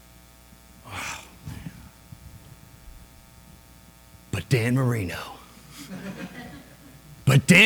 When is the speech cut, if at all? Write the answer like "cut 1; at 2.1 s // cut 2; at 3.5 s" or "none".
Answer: none